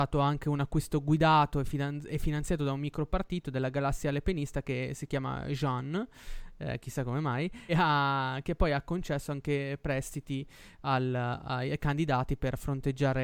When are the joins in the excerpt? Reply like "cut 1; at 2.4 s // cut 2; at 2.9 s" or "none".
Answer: cut 1; at 7.7 s